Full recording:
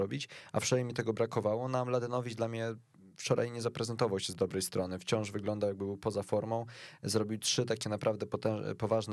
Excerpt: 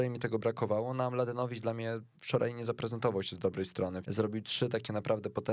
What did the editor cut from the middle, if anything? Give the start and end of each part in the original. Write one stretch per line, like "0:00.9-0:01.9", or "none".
0:02.9-0:03.1
0:05.0-0:07.0